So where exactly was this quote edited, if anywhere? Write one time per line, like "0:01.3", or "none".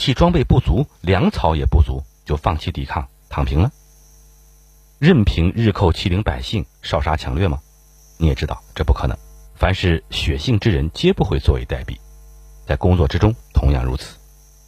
0:09.4